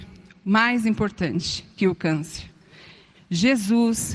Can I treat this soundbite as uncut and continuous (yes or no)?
no